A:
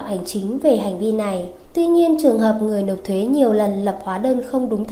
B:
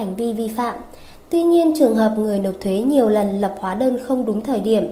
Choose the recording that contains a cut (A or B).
A